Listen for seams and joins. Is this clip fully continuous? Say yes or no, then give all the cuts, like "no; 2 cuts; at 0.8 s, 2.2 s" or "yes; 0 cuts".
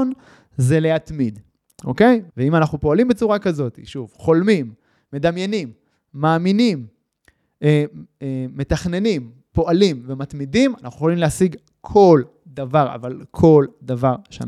no; 1 cut; at 2.3 s